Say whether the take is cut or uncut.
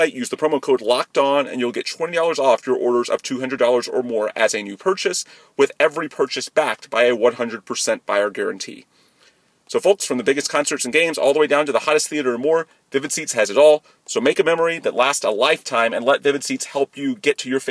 uncut